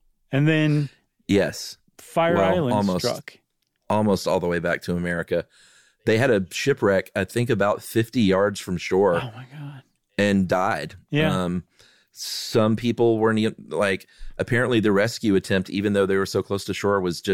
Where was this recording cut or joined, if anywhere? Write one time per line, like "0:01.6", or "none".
none